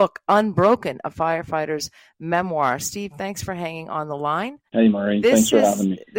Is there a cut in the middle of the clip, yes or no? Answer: yes